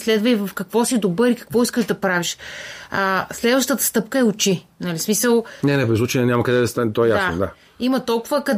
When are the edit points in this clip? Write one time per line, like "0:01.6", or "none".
none